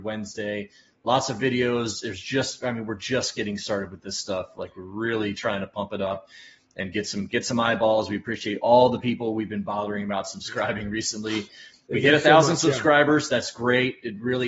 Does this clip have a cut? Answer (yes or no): no